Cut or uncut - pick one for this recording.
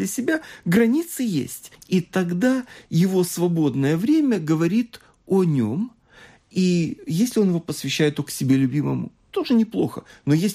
cut